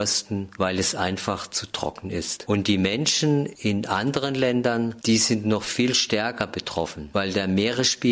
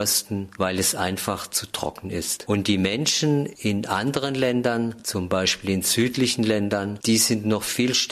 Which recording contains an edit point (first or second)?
first